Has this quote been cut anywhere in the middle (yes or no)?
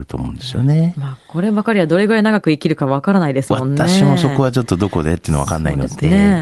no